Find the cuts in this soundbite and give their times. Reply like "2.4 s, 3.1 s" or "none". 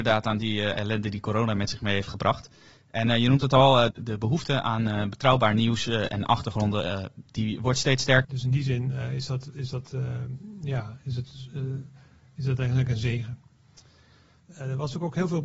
3.9 s, 8.2 s, 14.4 s